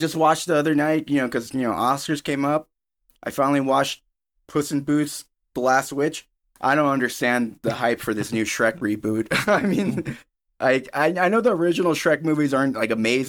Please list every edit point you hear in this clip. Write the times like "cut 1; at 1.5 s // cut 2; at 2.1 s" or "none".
none